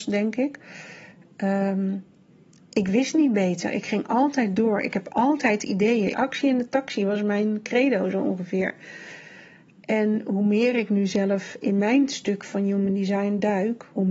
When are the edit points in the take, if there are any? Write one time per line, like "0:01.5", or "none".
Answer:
0:06.1